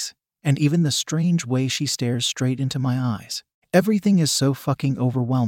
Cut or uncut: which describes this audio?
uncut